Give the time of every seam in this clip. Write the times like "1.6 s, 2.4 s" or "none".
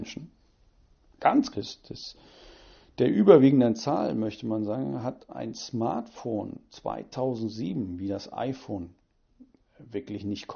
1.5 s